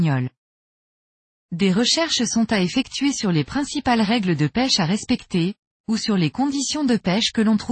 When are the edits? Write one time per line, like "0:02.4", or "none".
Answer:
none